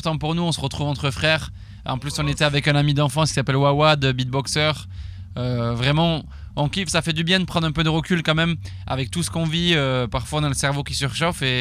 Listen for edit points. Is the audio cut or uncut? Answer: uncut